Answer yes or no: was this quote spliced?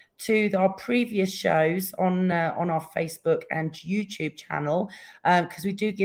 no